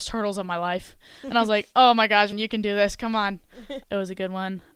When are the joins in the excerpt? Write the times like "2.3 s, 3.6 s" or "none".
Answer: 2.3 s, 3.8 s